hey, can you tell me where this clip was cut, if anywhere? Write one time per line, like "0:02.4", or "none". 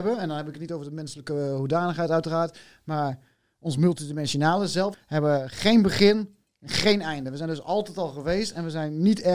0:04.9